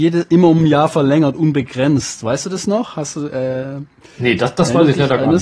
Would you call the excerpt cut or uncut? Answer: uncut